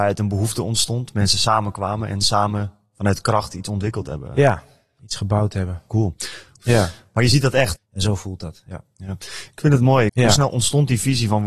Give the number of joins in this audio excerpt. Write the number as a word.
three